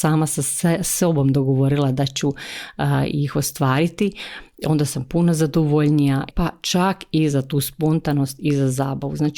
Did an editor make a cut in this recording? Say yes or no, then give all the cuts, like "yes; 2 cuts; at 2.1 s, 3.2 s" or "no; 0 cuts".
yes; 1 cut; at 6.3 s